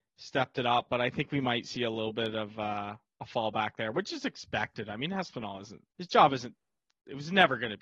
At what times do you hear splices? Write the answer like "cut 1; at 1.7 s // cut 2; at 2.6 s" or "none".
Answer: cut 1; at 5.9 s